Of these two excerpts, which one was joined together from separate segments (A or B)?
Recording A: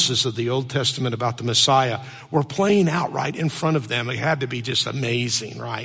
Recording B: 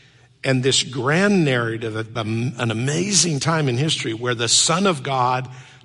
B